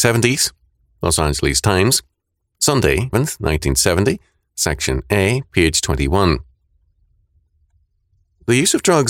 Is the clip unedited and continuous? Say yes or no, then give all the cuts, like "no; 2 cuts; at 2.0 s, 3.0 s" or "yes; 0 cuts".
no; 1 cut; at 3.1 s